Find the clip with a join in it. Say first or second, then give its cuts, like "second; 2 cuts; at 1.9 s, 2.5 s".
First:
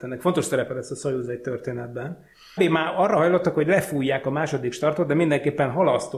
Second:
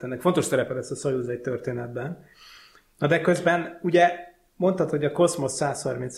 first; 1 cut; at 2.6 s